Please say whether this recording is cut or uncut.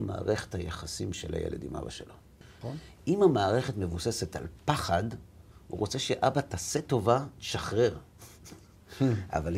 uncut